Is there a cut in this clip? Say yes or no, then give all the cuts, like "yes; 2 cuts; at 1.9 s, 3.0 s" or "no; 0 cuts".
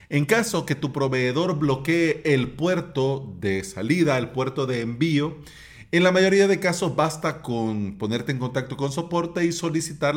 no; 0 cuts